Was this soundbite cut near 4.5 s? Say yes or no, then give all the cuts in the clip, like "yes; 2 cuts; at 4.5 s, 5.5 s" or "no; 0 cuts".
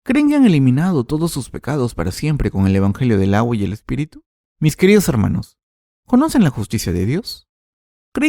yes; 1 cut; at 4.5 s